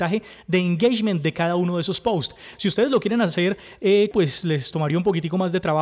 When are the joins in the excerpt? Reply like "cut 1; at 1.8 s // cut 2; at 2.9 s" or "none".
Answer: cut 1; at 4.1 s

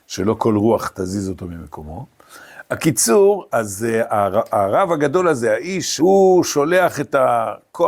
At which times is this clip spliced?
cut 1; at 3.5 s // cut 2; at 6.0 s

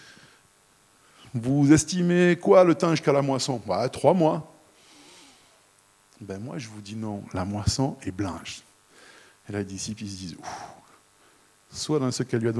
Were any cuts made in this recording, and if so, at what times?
none

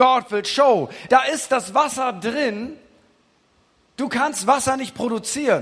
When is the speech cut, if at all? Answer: cut 1; at 1.1 s

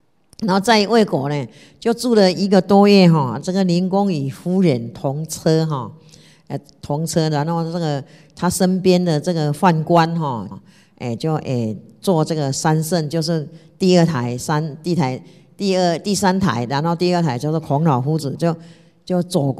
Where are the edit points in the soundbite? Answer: cut 1; at 10.5 s // cut 2; at 18.4 s

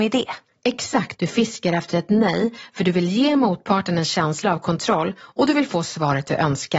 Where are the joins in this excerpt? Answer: cut 1; at 1.1 s

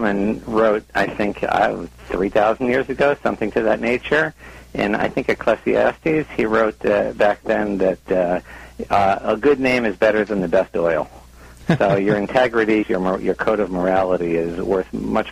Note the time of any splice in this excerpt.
cut 1; at 12.8 s

